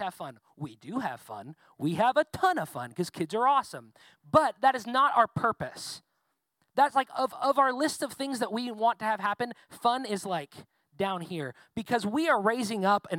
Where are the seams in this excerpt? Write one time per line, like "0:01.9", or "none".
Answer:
none